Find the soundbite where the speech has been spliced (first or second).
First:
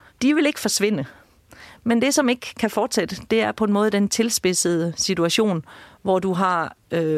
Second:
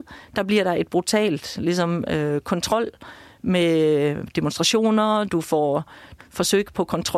second